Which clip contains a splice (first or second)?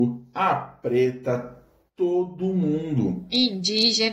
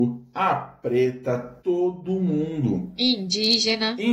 second